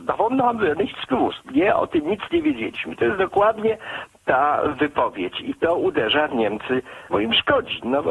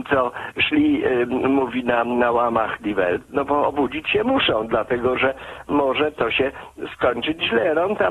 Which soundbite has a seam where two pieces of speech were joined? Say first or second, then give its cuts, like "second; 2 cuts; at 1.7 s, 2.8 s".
first; 2 cuts; at 4.1 s, 7.1 s